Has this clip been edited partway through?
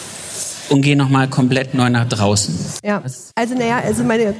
yes; 1 cut; at 3.3 s

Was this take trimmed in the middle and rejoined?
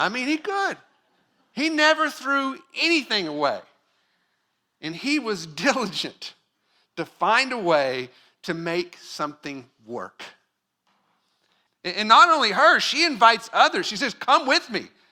yes; 1 cut; at 11.7 s

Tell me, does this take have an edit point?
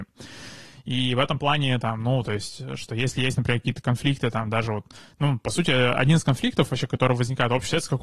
no; 0 cuts

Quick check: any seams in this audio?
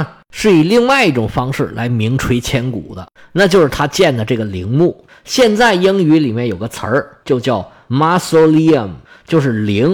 no; 0 cuts

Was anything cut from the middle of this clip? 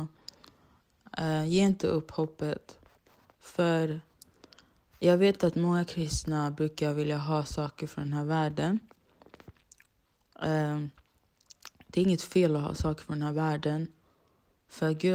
no; 0 cuts

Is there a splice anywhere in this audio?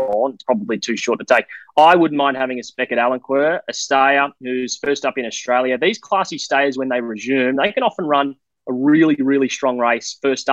no; 0 cuts

